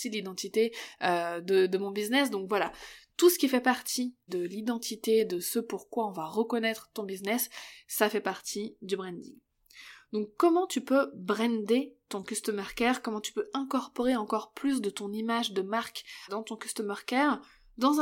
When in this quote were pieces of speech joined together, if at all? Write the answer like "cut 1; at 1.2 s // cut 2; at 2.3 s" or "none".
cut 1; at 4.3 s // cut 2; at 16.3 s

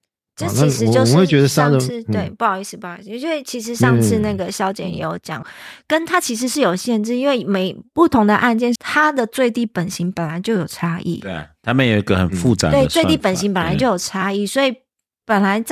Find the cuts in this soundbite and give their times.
cut 1; at 5.4 s // cut 2; at 8.8 s

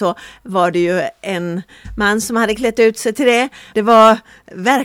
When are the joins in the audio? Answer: cut 1; at 3.7 s

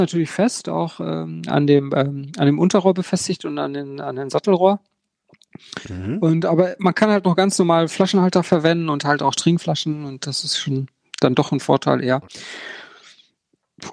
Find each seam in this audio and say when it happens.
none

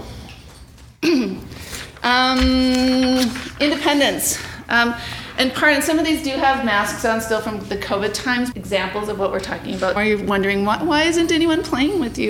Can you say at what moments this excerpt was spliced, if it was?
cut 1; at 8.5 s // cut 2; at 10.0 s

